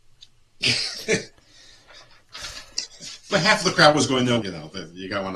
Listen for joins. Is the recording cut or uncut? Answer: cut